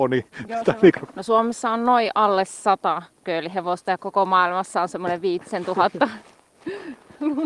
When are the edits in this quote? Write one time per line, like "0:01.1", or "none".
0:01.1